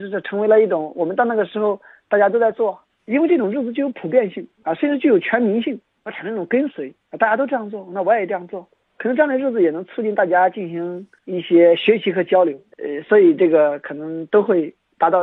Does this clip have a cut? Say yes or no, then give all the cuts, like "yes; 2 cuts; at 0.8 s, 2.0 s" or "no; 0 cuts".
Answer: yes; 2 cuts; at 6.0 s, 12.7 s